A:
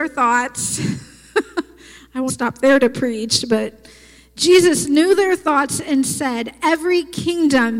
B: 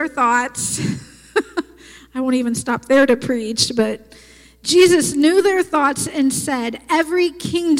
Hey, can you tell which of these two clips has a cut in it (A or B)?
A